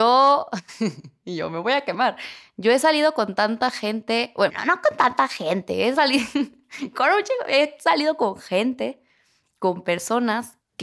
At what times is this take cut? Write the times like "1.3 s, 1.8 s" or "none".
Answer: 4.5 s